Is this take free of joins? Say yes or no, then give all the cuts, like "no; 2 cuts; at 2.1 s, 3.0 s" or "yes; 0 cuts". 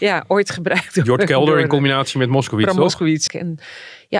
no; 1 cut; at 3.3 s